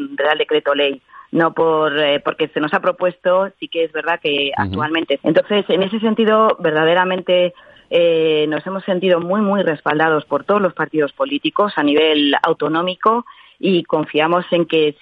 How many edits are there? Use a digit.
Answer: 1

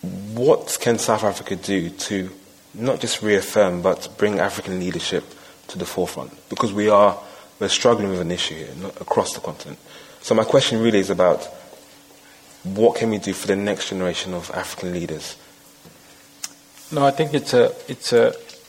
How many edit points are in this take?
0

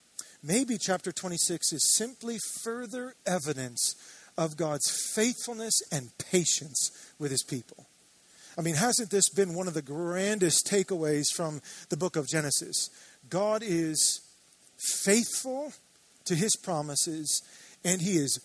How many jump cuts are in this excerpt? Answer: 0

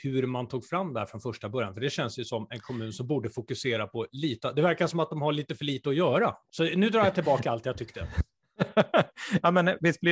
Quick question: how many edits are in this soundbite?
1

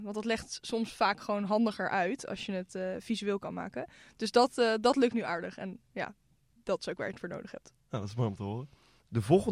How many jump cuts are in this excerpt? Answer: 0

